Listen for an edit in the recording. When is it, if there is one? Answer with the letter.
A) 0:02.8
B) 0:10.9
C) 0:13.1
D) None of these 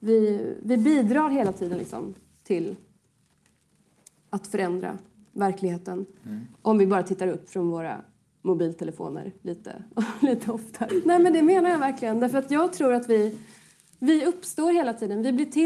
B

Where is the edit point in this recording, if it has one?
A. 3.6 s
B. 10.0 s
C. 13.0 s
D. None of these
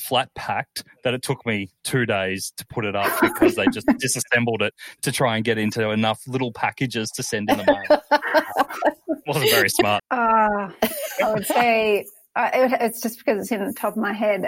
B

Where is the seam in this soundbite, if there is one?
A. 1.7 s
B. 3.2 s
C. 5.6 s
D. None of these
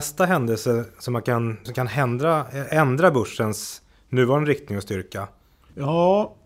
A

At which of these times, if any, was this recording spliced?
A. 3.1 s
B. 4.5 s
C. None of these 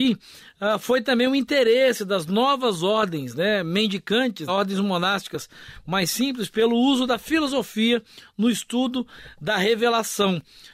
B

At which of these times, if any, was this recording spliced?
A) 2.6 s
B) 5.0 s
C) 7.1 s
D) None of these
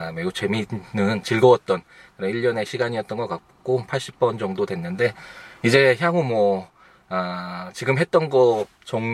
D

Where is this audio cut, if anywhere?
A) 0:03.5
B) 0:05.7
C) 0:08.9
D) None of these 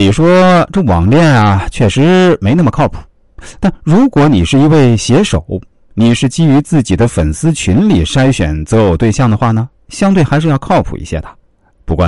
D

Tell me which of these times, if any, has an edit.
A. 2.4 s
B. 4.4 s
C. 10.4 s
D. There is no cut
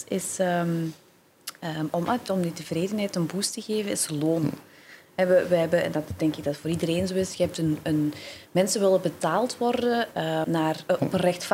C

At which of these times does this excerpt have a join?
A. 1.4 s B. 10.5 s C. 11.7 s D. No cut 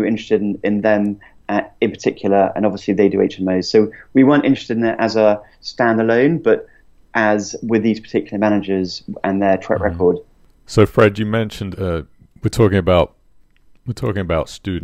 C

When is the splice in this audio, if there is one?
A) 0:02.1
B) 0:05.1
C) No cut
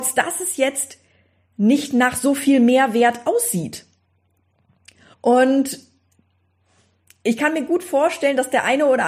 B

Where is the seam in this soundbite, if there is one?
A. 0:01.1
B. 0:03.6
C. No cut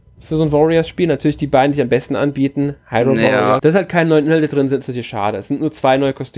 B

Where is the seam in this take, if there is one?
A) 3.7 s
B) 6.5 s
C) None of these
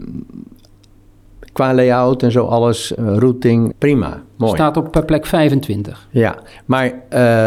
A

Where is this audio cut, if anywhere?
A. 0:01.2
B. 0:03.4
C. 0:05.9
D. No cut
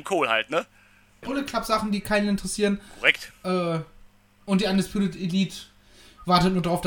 A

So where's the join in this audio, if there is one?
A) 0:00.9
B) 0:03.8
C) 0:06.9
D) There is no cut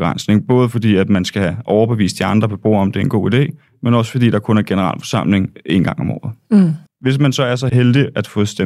C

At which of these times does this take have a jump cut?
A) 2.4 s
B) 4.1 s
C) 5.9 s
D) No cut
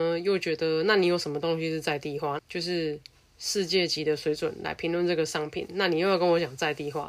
A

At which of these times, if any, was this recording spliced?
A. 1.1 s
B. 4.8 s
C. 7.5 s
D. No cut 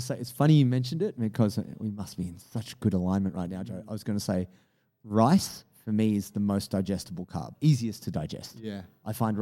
C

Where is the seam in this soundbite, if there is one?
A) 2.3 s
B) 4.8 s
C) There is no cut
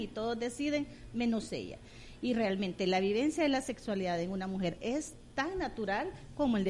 B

